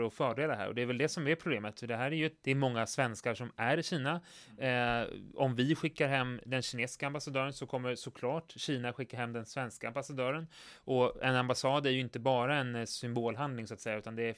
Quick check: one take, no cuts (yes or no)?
no